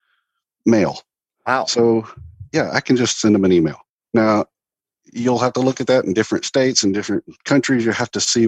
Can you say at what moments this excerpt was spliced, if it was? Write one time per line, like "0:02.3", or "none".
none